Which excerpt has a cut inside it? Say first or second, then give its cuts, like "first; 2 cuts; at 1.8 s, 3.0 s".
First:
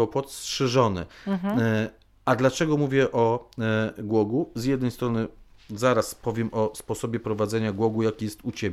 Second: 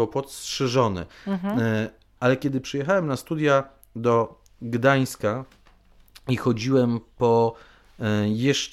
second; 1 cut; at 2.2 s